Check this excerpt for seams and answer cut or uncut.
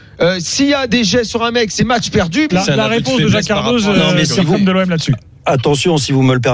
cut